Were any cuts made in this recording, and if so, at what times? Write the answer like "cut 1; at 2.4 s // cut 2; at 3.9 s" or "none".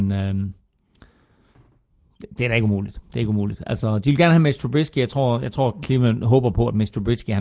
none